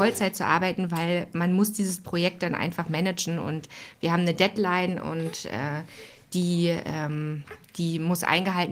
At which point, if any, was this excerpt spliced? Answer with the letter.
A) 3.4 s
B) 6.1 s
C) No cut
C